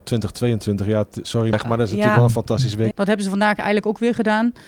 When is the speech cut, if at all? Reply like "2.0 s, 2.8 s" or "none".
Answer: 1.5 s, 2.9 s

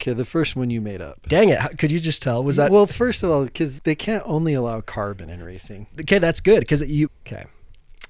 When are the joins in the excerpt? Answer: 3.8 s, 7.1 s

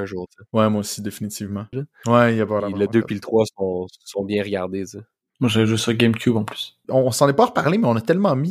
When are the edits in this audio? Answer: 1.7 s, 6.8 s

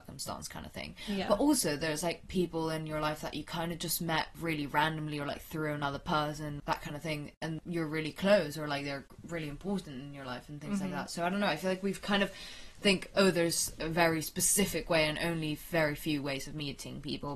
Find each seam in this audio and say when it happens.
none

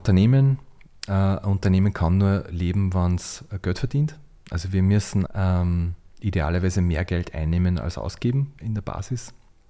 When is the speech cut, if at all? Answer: 5.3 s, 8.6 s

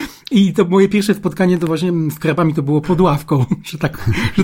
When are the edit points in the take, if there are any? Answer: 2.8 s

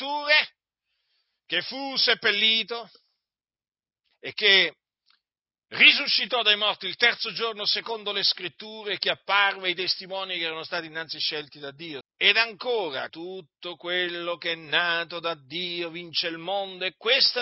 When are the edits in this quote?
12.0 s, 13.1 s

